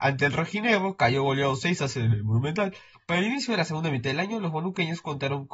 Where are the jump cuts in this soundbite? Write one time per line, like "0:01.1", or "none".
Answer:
0:02.9